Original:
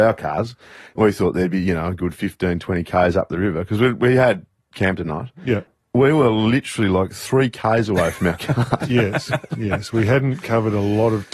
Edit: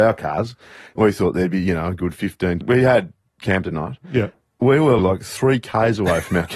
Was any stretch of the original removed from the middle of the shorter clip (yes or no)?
yes